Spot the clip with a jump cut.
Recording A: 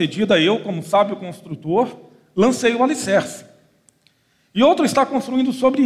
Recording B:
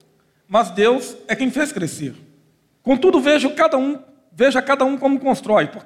B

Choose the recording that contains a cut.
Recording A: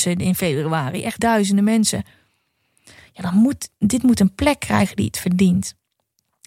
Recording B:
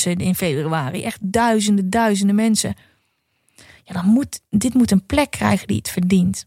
A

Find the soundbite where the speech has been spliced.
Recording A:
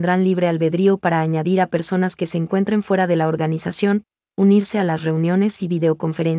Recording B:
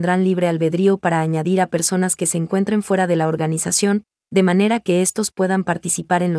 A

